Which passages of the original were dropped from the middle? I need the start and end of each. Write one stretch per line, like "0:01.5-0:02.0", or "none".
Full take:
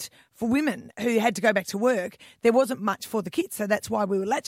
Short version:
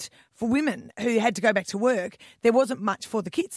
none